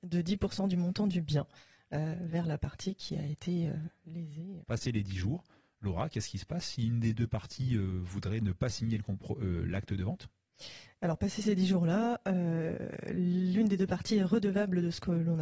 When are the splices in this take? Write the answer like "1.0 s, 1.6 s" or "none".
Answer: 4.6 s